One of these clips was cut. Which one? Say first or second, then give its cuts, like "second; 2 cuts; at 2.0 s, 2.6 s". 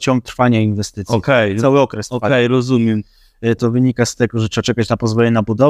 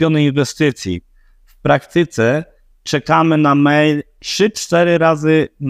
first; 1 cut; at 3.6 s